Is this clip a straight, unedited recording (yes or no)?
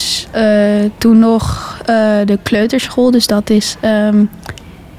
yes